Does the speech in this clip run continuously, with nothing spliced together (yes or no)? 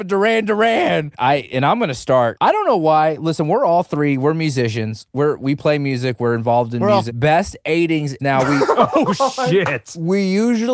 no